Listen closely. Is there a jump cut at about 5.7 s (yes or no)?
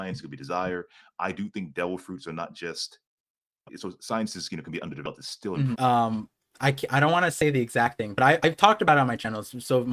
yes